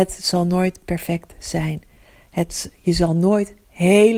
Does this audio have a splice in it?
no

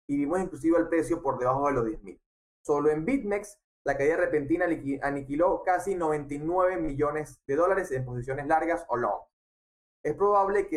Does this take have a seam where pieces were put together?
yes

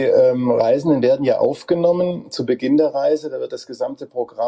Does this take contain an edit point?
no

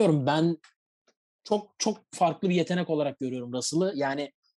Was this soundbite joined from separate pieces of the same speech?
no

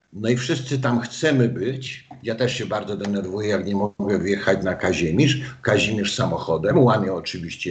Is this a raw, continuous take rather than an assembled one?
yes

